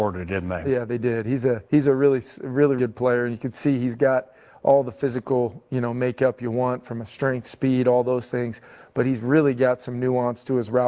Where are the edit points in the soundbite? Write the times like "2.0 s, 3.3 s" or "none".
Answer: 1.7 s, 2.8 s

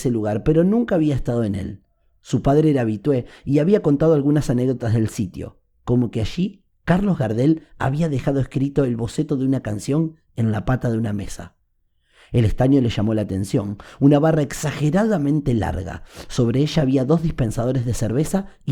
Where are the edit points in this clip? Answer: none

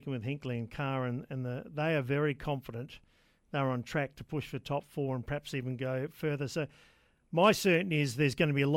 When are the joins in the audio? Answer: none

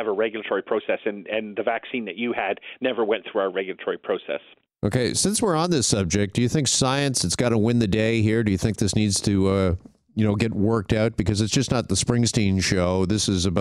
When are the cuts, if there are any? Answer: none

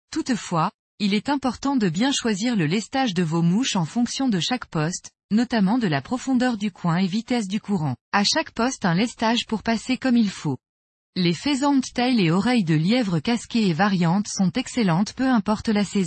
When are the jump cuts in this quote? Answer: 8.0 s

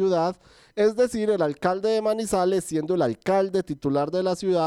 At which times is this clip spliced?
none

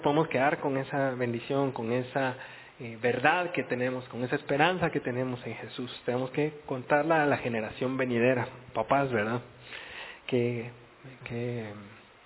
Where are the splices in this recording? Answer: none

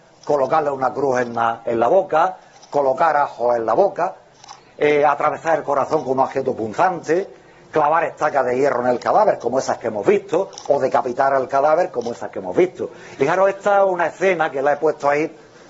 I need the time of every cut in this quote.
13.2 s

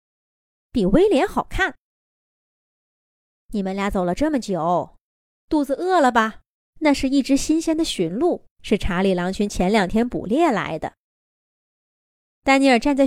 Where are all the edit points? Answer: 6.6 s, 8.5 s

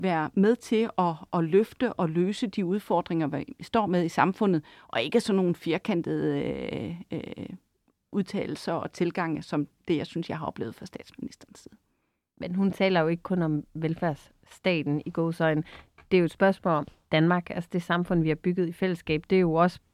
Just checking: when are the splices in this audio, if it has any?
none

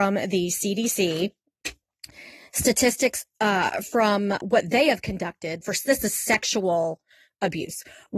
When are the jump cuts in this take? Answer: 4.4 s, 5.6 s

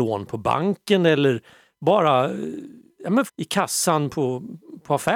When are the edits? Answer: 3.3 s

